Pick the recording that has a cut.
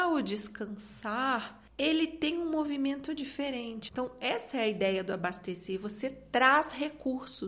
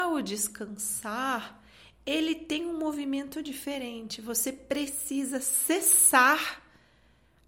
first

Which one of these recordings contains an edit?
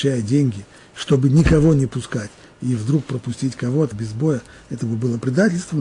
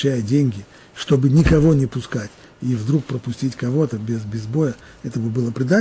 first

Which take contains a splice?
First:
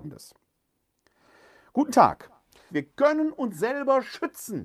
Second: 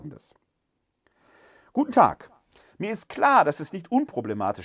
first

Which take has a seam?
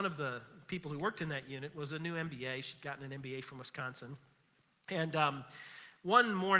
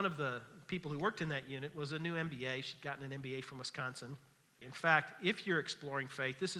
second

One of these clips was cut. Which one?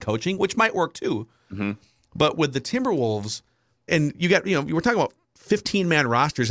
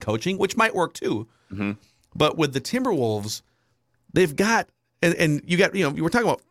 first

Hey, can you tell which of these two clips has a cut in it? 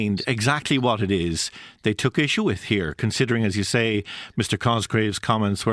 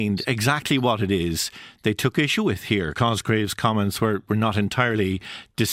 second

